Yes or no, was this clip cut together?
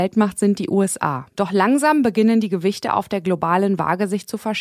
yes